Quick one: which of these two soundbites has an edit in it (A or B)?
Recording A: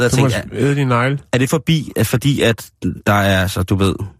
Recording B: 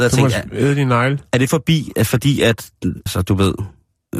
B